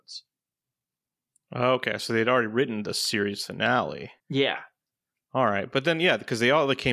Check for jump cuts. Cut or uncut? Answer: cut